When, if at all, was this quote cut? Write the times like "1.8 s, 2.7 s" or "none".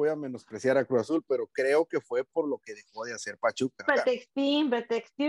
3.9 s

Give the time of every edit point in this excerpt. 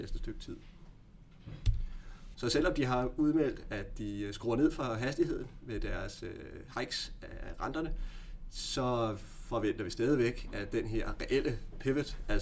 2.3 s

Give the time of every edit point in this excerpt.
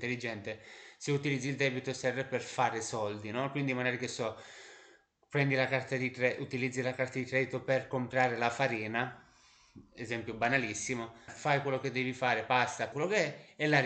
11.3 s, 12.9 s

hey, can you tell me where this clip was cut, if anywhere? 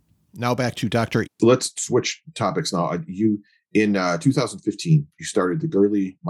1.3 s

